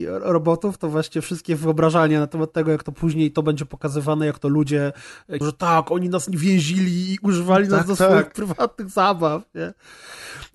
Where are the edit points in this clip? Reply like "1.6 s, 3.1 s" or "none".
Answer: 5.4 s